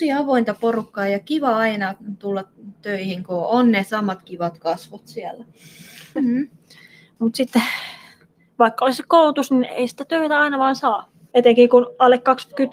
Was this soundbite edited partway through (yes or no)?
yes